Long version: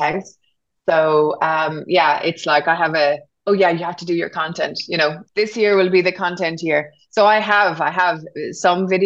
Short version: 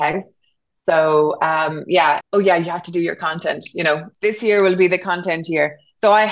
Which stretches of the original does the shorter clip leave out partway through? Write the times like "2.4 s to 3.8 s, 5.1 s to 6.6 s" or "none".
2.2 s to 3.3 s